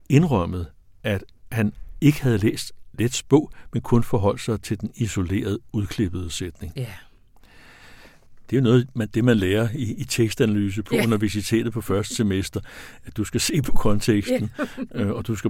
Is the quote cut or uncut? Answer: uncut